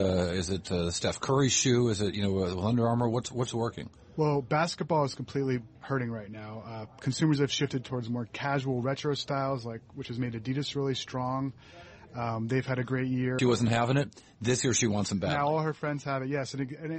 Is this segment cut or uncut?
cut